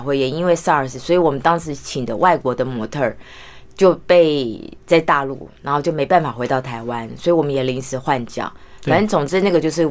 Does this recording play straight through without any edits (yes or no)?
yes